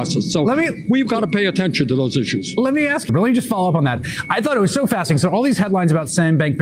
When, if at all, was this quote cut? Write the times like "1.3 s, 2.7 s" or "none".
3.1 s